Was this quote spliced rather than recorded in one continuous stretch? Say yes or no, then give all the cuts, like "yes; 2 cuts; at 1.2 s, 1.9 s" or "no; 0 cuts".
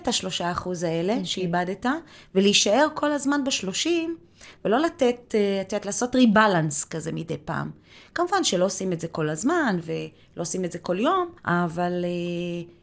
yes; 1 cut; at 11.4 s